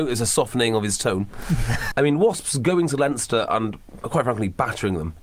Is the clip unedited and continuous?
no; 1 cut; at 1.9 s

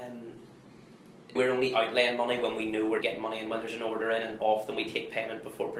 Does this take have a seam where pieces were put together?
yes; 2 cuts; at 1.4 s, 3.0 s

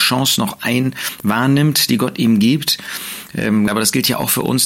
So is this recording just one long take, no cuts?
no; 1 cut; at 3.7 s

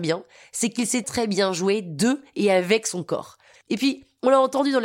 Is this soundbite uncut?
no; 2 cuts; at 1.0 s, 3.6 s

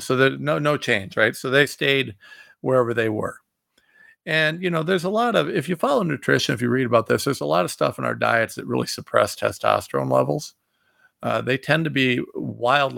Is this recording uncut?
yes; 0 cuts

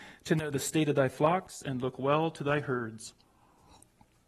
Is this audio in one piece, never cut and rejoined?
yes; 0 cuts

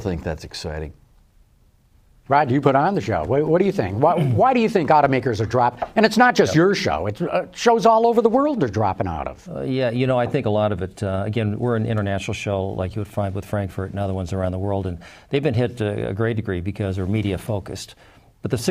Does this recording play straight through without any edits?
yes; 0 cuts

